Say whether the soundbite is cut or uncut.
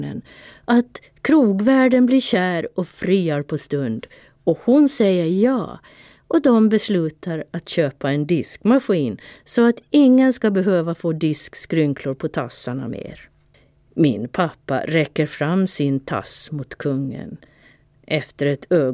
uncut